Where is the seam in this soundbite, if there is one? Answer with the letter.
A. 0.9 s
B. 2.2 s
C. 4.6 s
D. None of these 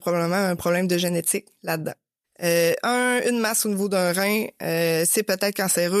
B